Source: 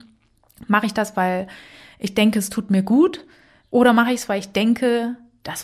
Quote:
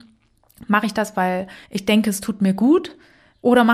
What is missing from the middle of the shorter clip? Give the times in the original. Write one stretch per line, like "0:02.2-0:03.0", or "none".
0:01.6-0:01.9